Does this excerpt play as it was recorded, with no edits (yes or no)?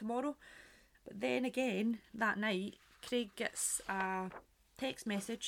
no